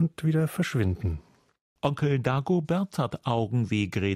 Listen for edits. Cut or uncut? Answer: uncut